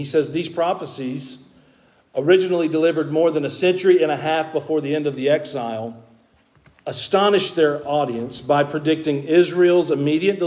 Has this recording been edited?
no; 0 cuts

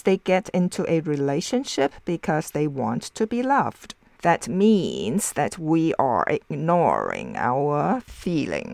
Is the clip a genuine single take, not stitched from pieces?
no; 1 cut; at 4.2 s

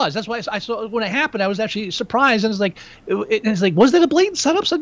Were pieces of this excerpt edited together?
no; 0 cuts

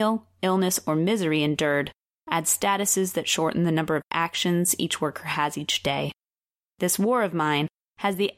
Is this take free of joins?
yes; 0 cuts

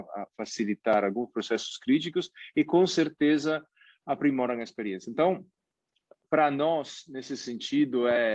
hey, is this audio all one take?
yes; 0 cuts

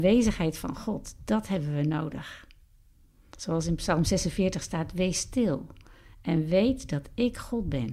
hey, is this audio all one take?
yes; 0 cuts

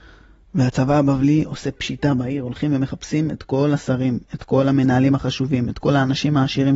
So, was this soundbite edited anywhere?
no; 0 cuts

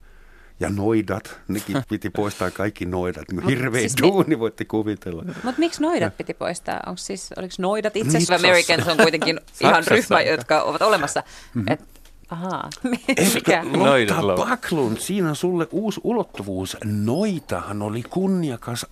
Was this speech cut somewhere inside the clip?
yes; 3 cuts; at 1.8 s, 8.3 s, 12.8 s

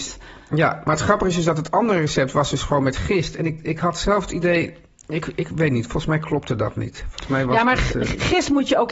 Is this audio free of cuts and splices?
yes; 0 cuts

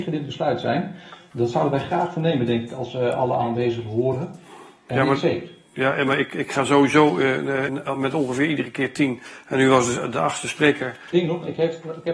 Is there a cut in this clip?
yes; 2 cuts; at 7.7 s, 11.1 s

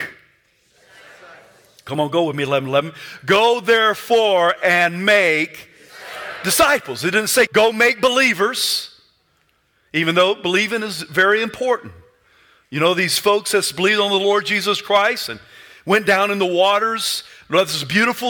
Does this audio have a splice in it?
yes; 1 cut; at 7.5 s

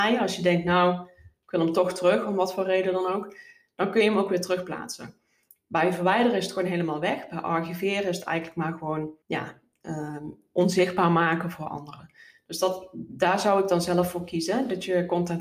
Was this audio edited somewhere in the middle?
yes; 1 cut; at 9.2 s

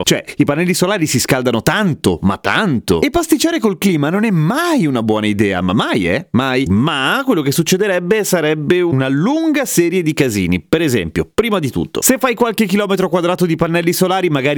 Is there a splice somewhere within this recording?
yes; 1 cut; at 6.7 s

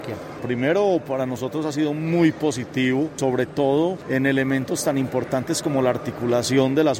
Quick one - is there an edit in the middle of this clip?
no; 0 cuts

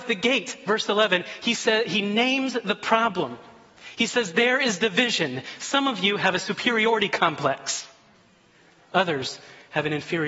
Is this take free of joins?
yes; 0 cuts

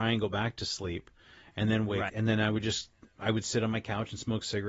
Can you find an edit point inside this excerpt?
yes; 1 cut; at 2.1 s

